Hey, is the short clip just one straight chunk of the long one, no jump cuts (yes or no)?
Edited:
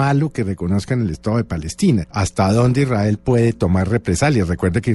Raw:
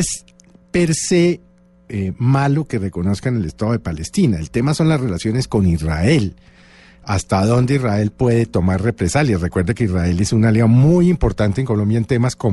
no